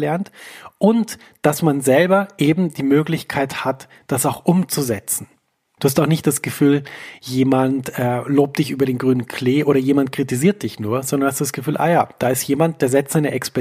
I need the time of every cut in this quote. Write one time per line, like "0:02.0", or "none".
0:05.8